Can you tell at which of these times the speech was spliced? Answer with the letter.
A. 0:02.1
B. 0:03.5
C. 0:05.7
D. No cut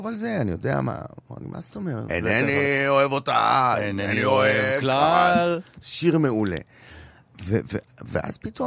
A